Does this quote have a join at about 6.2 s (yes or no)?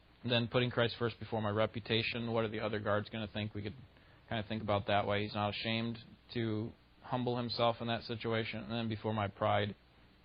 yes